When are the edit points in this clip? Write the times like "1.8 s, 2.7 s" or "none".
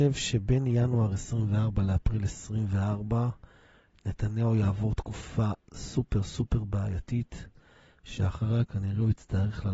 none